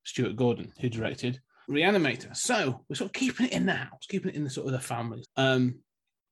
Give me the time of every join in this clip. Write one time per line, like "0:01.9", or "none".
0:01.6
0:05.2